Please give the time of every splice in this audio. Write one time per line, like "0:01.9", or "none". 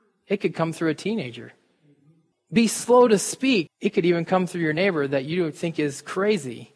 0:02.3
0:03.7